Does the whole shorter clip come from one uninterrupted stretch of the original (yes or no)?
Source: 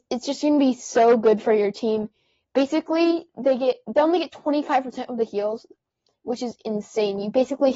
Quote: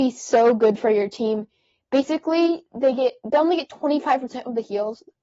yes